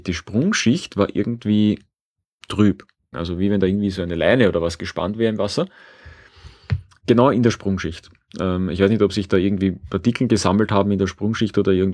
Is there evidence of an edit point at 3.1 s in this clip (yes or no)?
yes